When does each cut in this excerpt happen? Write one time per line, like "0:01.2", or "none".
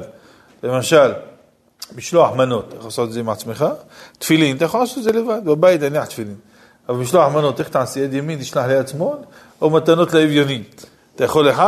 none

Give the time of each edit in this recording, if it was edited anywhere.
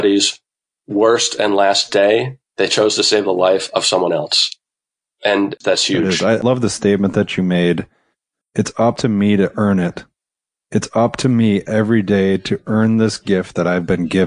none

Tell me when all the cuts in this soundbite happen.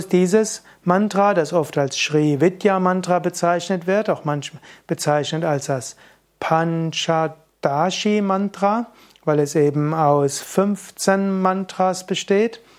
none

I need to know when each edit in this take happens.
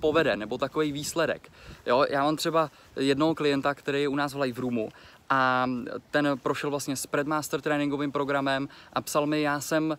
none

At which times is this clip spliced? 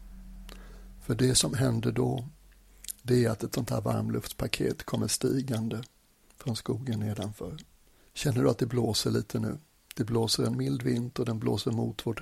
0:08.0

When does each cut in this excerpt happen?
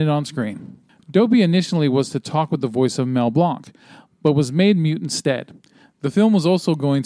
0:01.0
0:05.9

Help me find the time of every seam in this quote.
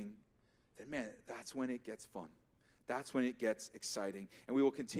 none

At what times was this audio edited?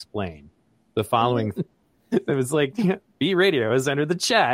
0:01.6

